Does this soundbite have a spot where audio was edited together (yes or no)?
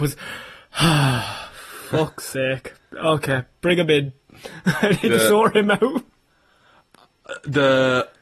no